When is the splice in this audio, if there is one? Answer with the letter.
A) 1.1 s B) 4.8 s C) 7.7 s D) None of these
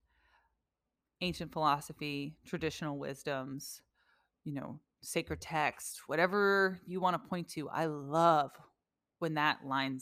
D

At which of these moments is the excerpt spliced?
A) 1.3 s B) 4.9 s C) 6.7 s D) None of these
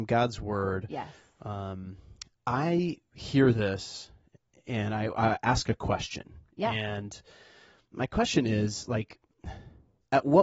D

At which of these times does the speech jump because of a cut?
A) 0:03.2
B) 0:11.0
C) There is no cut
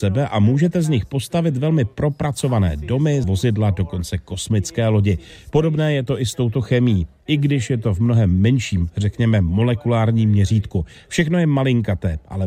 A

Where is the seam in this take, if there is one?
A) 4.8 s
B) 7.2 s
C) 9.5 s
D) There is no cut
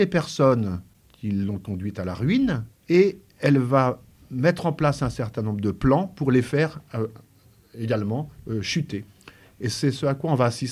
D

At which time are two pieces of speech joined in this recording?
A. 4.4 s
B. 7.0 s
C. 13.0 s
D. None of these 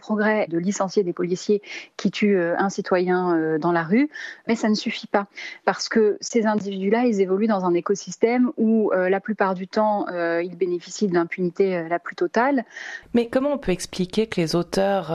C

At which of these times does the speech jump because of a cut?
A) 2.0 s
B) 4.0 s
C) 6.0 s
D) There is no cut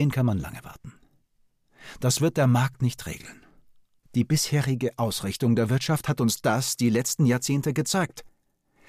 B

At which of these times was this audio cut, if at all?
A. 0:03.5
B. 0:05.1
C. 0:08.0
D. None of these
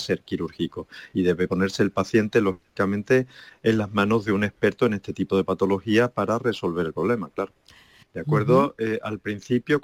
C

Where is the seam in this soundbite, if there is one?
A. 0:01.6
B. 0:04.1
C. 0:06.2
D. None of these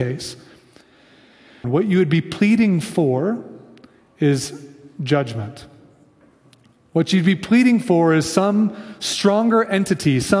A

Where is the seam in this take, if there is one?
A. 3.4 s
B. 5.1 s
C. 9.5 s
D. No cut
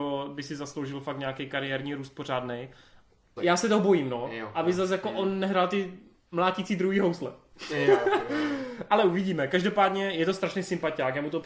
A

